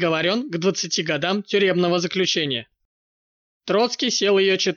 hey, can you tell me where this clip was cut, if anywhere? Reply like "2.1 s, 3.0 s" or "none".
3.6 s